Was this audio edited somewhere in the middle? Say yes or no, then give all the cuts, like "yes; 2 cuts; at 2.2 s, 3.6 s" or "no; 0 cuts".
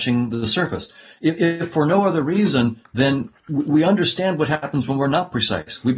no; 0 cuts